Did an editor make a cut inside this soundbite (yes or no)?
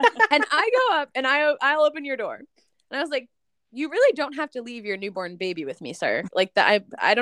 no